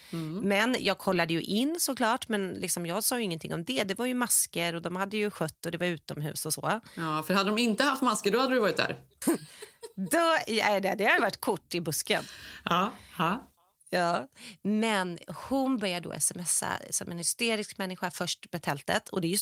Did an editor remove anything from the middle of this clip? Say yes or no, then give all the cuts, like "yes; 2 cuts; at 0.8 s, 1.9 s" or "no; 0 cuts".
yes; 1 cut; at 9.2 s